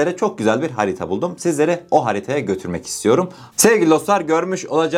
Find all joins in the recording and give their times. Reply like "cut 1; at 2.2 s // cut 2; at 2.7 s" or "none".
cut 1; at 3.5 s